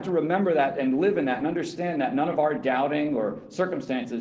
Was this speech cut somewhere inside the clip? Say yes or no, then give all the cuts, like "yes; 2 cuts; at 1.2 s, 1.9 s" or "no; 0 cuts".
no; 0 cuts